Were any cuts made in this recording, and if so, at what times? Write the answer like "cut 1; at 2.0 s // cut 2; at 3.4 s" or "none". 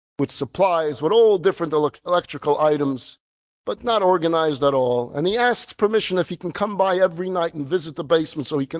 none

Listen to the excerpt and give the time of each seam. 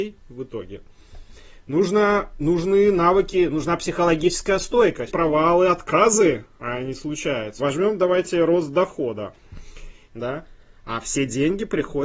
cut 1; at 5.1 s // cut 2; at 7.6 s // cut 3; at 10.1 s

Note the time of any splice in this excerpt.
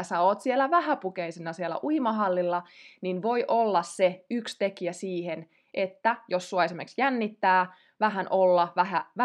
none

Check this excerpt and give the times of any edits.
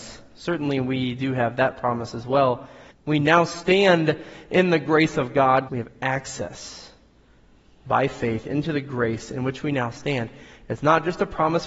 cut 1; at 2.9 s // cut 2; at 5.7 s

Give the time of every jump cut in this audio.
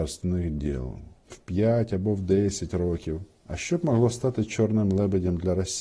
cut 1; at 1.2 s

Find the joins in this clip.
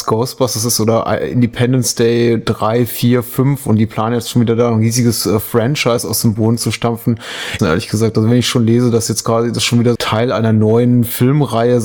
cut 1; at 7.6 s // cut 2; at 10.0 s

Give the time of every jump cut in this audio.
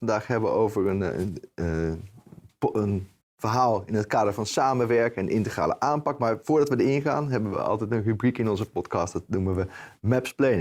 none

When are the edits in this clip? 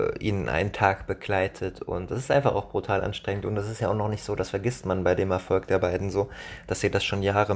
none

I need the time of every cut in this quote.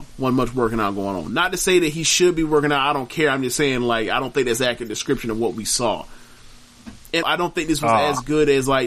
cut 1; at 7.2 s

